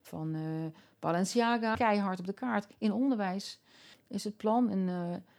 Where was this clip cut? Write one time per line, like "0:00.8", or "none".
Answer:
0:01.7
0:03.9